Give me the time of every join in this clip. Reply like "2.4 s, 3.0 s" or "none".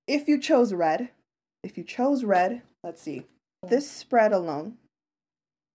3.6 s